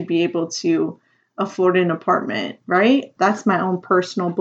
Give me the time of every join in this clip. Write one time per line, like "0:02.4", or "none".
0:03.2